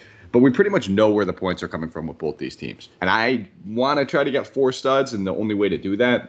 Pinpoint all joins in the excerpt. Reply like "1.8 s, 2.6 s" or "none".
3.0 s